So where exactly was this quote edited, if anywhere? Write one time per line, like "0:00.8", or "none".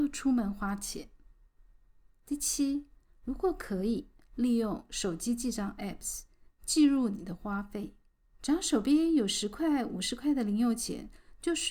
0:08.3